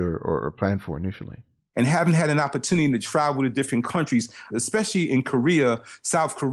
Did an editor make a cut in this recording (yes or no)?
yes